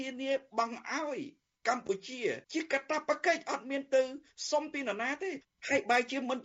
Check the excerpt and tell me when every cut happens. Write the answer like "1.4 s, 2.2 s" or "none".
2.4 s